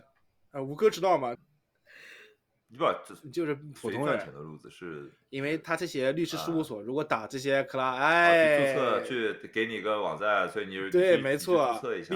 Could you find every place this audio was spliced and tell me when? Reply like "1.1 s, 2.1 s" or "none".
1.4 s